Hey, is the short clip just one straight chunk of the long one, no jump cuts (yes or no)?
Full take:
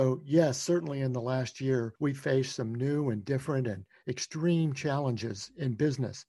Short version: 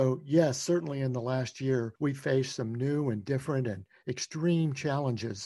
yes